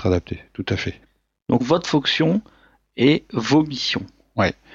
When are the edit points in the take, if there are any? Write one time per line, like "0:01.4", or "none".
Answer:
0:01.6